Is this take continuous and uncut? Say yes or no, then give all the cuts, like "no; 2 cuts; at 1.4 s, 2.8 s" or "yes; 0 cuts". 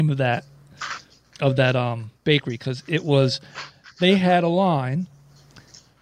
yes; 0 cuts